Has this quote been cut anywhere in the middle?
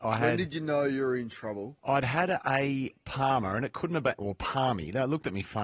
no; 0 cuts

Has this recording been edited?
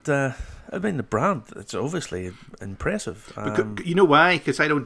no; 0 cuts

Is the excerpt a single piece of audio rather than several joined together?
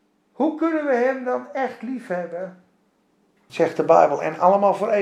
no; 1 cut; at 3.5 s

